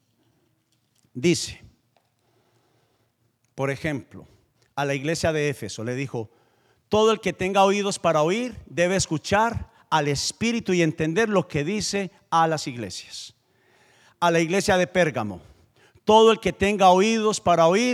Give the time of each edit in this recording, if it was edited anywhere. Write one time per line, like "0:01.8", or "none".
none